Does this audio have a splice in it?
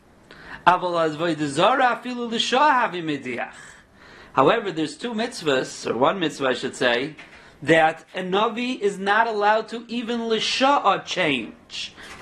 no; 0 cuts

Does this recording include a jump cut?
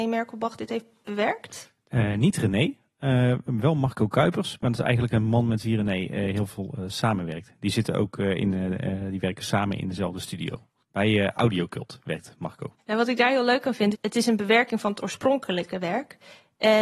yes; 2 cuts; at 12.8 s, 13.9 s

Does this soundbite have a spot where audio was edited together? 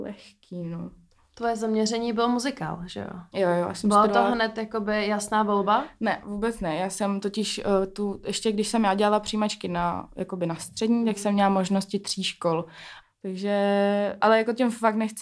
yes; 2 cuts; at 13.0 s, 14.2 s

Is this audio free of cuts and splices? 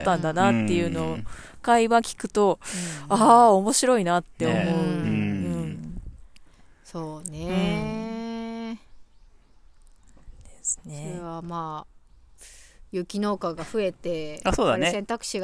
yes; 0 cuts

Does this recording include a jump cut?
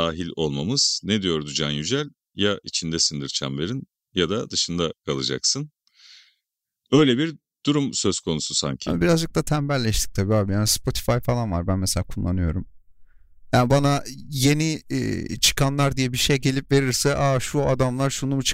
no; 0 cuts

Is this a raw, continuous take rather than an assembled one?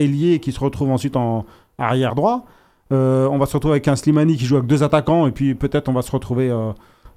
no; 1 cut; at 2.1 s

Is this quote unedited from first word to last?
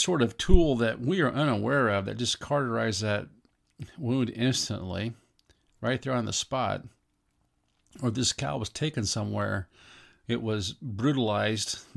yes; 0 cuts

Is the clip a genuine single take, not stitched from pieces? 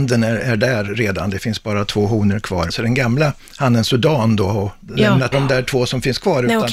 no; 2 cuts; at 2.7 s, 5.3 s

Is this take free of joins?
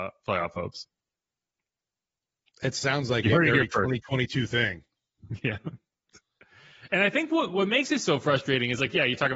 yes; 0 cuts

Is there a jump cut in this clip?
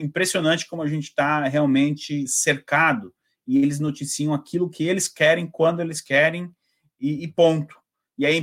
no; 0 cuts

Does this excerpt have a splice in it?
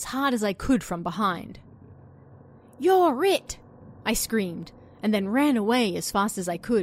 no; 0 cuts

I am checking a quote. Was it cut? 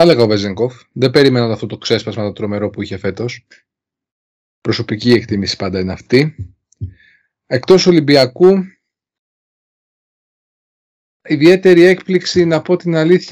no; 0 cuts

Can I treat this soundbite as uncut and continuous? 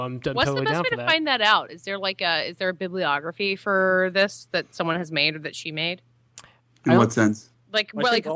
yes; 0 cuts

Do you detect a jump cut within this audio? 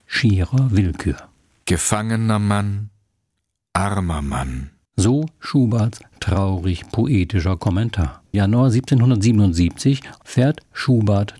yes; 1 cut; at 8.3 s

